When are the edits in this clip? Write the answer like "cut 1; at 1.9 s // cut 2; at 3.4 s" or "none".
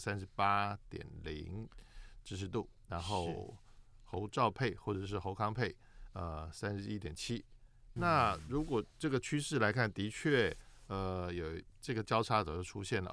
cut 1; at 8.0 s